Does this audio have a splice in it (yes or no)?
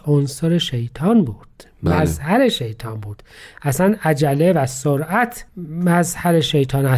yes